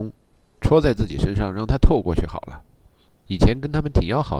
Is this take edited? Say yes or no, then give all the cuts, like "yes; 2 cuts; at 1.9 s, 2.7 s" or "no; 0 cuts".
yes; 1 cut; at 3.3 s